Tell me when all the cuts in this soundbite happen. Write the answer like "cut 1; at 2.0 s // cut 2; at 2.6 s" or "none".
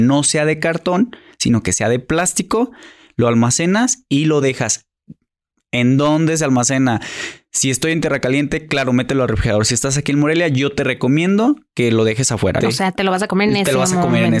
cut 1; at 12.6 s